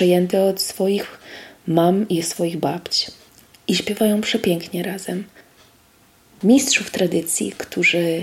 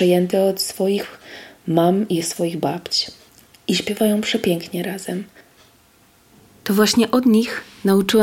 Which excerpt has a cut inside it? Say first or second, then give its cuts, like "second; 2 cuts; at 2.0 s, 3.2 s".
first; 1 cut; at 6.4 s